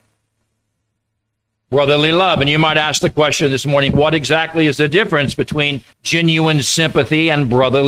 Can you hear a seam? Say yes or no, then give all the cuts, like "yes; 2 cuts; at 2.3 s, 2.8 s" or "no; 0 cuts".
yes; 2 cuts; at 3.9 s, 5.9 s